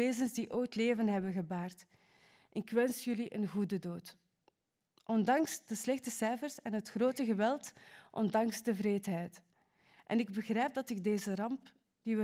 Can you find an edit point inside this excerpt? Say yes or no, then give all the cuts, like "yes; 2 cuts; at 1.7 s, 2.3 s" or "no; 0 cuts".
no; 0 cuts